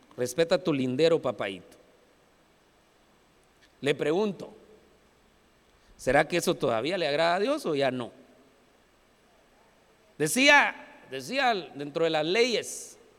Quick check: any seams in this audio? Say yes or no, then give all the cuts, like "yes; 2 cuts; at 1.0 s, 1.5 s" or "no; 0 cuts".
yes; 1 cut; at 10.1 s